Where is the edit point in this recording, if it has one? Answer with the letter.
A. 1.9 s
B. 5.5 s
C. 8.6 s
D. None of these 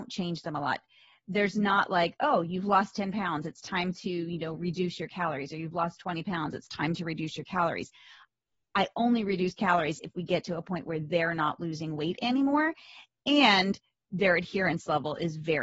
D